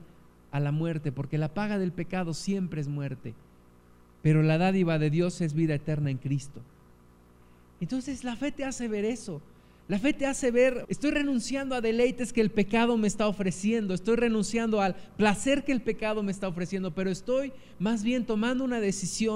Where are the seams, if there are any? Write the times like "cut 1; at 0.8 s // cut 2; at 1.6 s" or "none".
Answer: cut 1; at 10.8 s